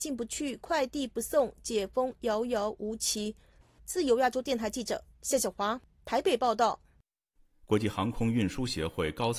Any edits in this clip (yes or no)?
no